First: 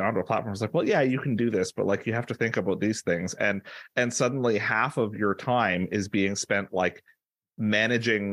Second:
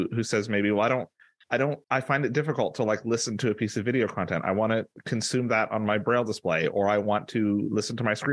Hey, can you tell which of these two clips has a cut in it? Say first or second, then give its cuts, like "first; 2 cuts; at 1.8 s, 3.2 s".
second; 1 cut; at 1.8 s